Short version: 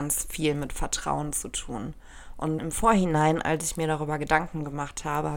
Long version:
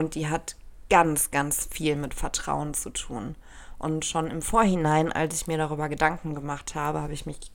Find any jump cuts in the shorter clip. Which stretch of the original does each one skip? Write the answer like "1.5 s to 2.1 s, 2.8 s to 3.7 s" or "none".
4.0 s to 4.3 s